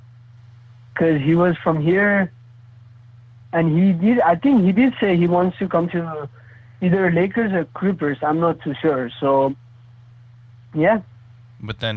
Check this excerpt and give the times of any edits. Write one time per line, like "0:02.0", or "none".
none